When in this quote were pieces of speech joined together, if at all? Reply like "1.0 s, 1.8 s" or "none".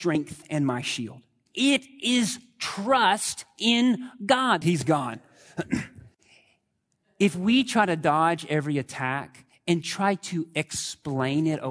1.5 s, 4.6 s